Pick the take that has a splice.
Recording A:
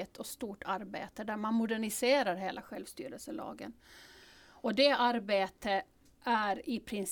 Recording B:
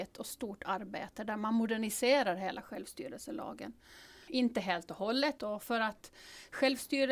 B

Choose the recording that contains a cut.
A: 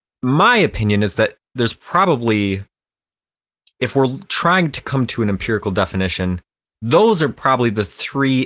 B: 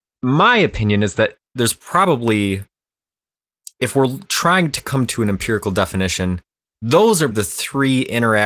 B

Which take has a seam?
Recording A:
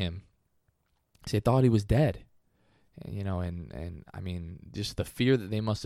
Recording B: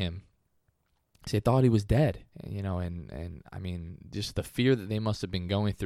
B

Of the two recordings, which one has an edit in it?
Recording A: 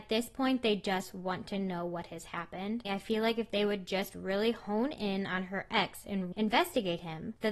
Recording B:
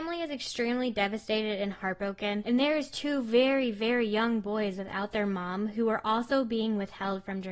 A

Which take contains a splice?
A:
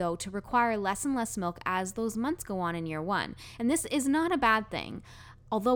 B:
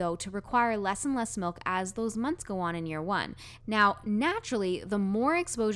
B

